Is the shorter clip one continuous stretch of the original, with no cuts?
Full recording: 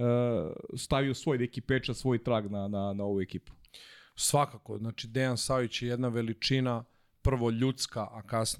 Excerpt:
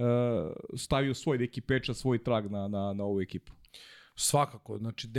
yes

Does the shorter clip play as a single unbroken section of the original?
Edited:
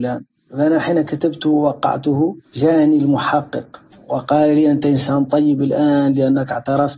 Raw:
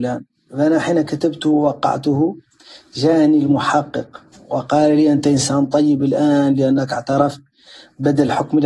no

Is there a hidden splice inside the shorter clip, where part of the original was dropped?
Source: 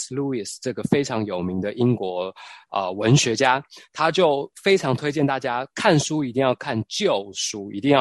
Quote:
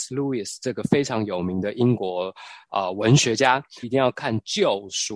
yes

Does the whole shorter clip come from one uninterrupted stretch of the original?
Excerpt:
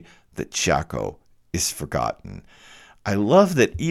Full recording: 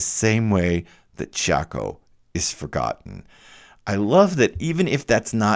yes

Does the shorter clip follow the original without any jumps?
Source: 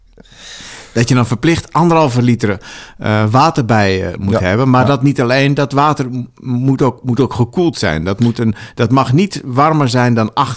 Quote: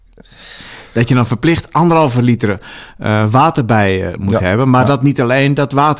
yes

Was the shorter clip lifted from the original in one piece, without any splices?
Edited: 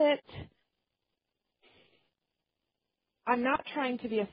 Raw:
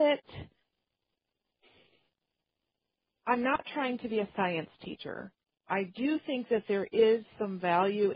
yes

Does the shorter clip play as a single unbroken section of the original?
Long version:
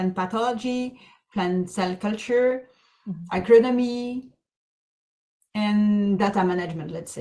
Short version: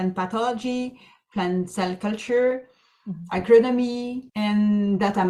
no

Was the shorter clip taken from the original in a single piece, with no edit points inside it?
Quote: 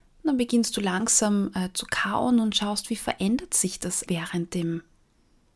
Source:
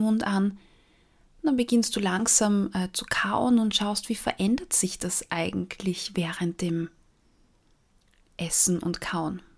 no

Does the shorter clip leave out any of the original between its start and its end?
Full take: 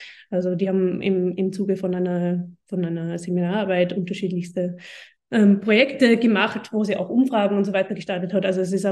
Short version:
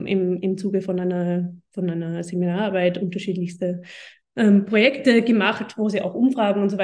no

